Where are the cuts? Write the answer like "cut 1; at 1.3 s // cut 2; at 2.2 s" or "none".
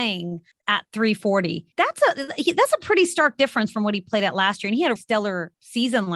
cut 1; at 1.7 s // cut 2; at 5.0 s